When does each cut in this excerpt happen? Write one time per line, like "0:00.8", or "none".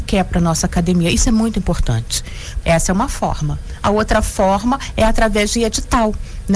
0:02.6